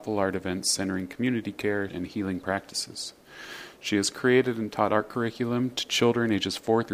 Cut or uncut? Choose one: cut